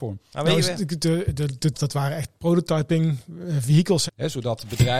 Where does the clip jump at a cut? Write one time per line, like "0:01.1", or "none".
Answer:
0:01.7
0:04.1